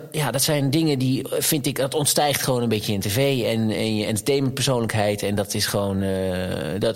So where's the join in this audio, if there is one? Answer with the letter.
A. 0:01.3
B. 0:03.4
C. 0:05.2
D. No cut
D